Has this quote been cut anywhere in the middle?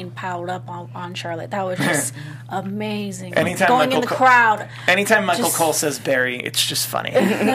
no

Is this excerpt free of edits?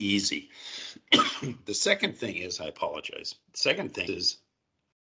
no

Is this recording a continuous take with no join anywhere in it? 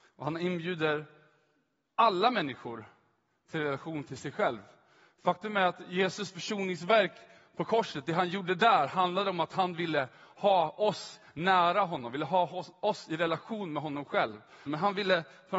no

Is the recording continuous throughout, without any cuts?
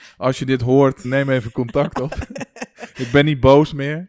no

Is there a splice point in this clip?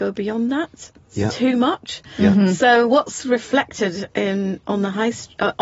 no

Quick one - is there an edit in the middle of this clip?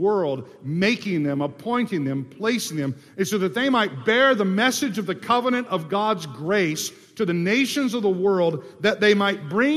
no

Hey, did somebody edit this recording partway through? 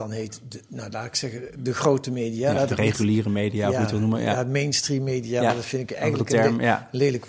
no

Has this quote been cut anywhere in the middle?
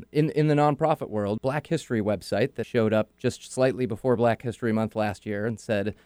yes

